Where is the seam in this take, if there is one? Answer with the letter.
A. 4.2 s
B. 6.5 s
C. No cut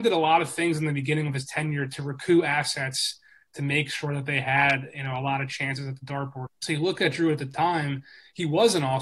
B